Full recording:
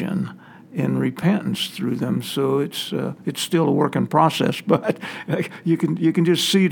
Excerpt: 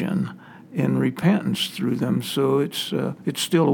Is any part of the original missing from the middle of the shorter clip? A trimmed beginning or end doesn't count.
no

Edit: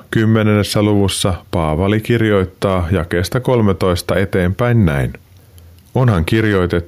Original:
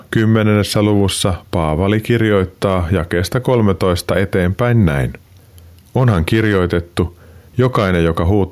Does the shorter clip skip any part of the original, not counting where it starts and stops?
no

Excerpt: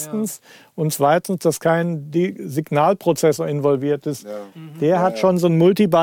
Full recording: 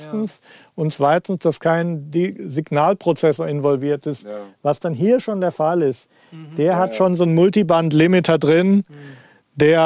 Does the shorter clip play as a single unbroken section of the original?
no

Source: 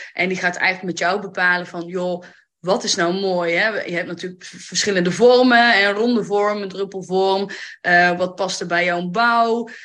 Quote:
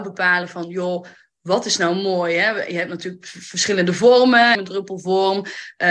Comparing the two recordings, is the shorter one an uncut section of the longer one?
no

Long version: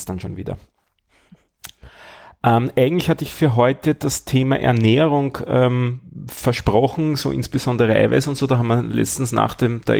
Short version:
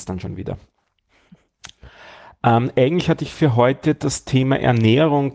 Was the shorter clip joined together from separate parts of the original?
no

